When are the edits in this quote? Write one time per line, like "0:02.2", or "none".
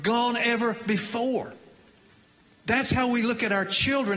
none